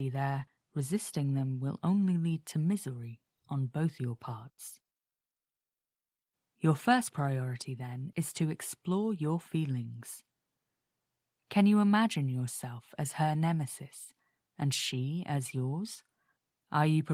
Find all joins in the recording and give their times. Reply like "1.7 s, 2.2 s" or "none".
none